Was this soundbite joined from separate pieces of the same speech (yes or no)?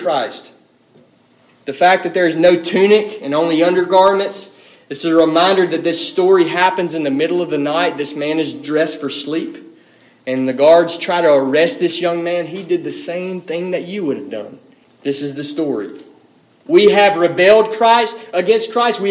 yes